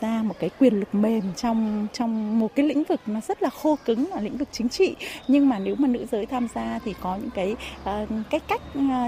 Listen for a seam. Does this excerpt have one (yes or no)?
no